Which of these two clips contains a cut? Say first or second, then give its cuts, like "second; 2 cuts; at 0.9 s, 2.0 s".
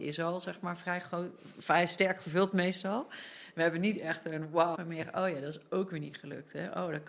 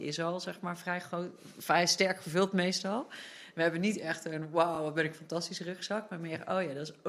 first; 1 cut; at 4.8 s